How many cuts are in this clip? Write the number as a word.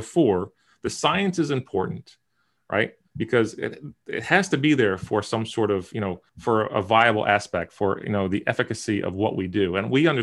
one